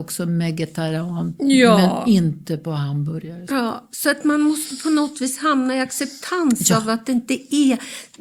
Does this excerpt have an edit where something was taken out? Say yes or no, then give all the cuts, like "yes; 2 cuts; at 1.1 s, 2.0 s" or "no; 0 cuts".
no; 0 cuts